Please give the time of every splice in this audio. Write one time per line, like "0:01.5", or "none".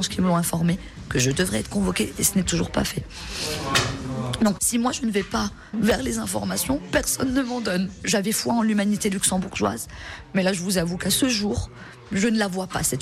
0:04.6
0:05.7